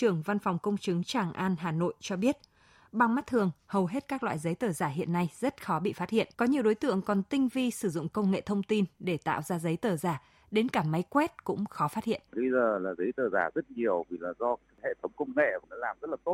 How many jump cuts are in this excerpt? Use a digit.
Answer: 2